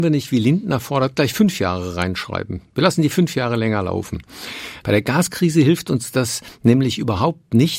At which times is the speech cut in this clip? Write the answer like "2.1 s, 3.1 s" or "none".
4.8 s